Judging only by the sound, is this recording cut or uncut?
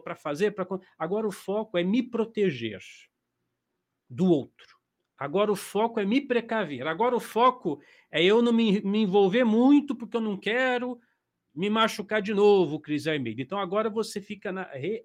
uncut